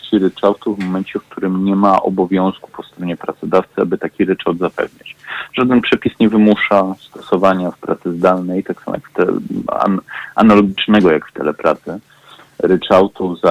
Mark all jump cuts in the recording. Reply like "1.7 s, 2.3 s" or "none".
none